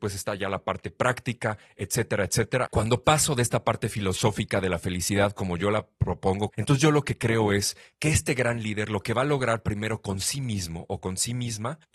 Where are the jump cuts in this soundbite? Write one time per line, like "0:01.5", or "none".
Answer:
0:02.7
0:06.5